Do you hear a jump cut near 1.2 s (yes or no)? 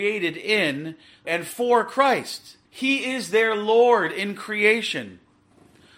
yes